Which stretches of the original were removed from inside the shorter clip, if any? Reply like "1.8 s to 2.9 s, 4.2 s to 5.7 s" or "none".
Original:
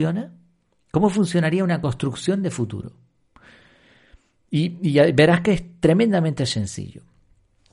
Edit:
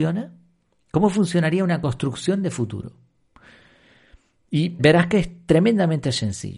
4.8 s to 5.1 s